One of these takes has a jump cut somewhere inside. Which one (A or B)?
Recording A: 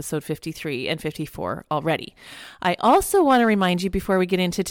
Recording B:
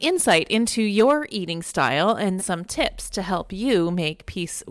B